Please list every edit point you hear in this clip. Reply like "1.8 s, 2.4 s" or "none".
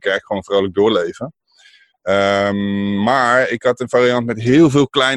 none

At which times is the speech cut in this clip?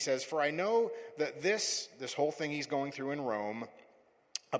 none

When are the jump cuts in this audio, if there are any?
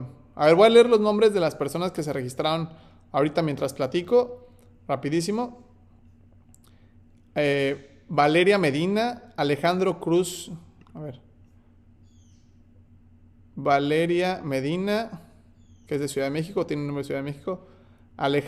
none

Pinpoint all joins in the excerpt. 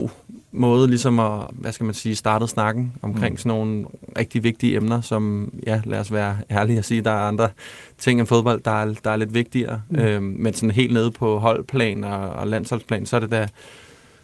1.5 s

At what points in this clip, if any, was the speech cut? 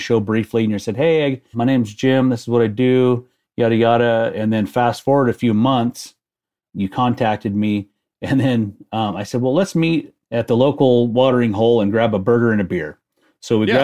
1.5 s, 10.2 s

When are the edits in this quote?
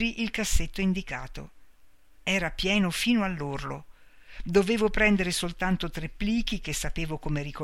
none

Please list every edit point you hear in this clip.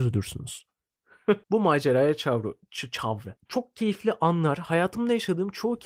1.4 s, 3.4 s

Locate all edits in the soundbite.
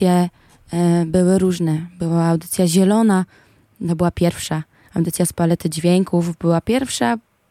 none

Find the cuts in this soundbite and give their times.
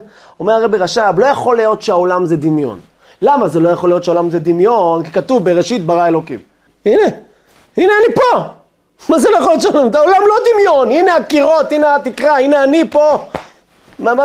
6.7 s

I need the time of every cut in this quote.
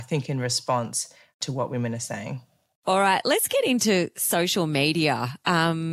none

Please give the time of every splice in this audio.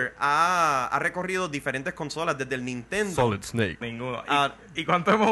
3.8 s

